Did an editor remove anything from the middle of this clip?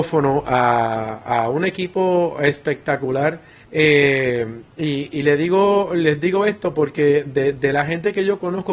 yes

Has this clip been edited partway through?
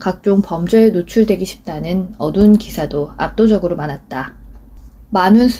no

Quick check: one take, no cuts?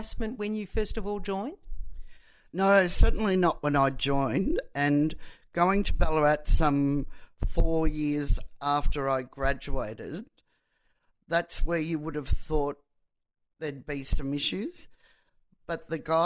yes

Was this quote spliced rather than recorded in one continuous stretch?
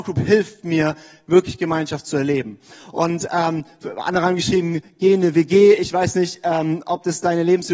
no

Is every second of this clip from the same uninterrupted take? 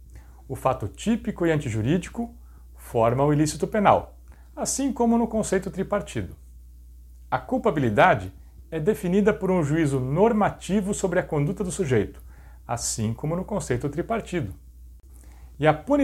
yes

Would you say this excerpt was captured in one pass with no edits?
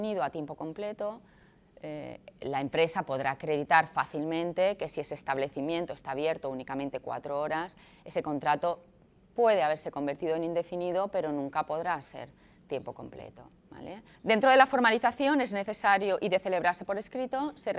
no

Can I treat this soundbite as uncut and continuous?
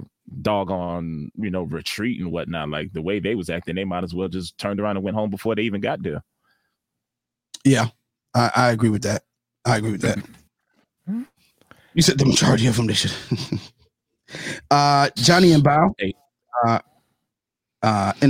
yes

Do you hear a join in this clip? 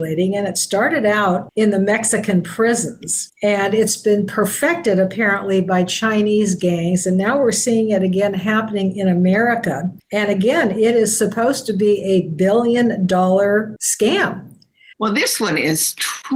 yes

